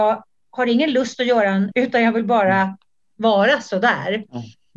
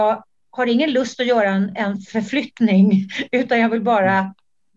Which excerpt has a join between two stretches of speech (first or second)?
first